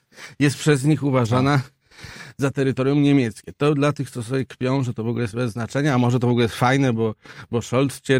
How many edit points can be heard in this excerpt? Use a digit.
0